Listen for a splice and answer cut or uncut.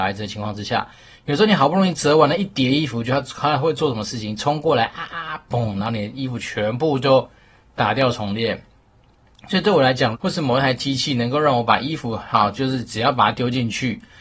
cut